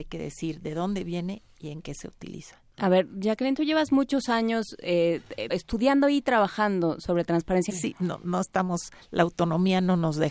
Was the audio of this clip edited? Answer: yes; 2 cuts; at 5.5 s, 7.7 s

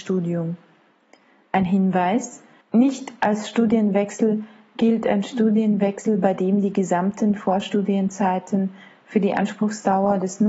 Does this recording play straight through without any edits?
yes; 0 cuts

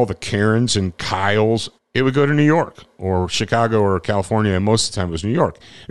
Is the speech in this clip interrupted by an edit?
yes; 1 cut; at 1.8 s

